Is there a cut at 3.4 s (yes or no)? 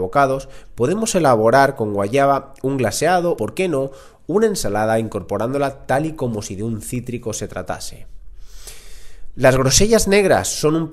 yes